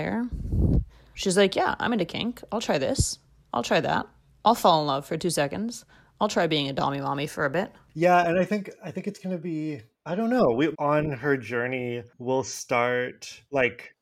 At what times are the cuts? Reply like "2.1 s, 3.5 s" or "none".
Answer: 1.1 s, 10.7 s